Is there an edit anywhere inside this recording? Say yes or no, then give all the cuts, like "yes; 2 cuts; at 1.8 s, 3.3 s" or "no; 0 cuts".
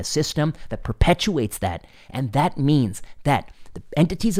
no; 0 cuts